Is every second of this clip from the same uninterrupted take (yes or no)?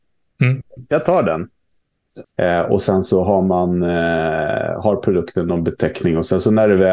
no